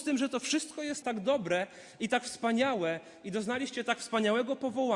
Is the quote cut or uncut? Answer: cut